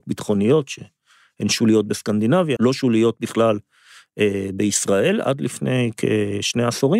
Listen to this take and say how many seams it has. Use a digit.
1